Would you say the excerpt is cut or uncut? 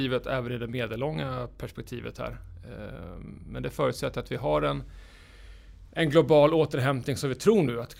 uncut